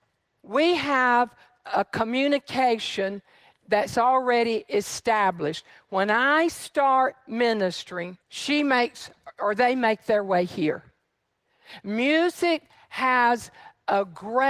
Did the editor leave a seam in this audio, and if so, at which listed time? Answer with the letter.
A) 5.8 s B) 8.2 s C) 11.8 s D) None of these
B